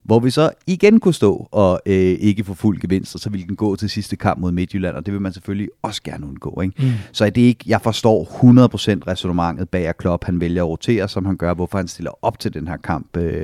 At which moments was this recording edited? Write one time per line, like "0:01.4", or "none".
none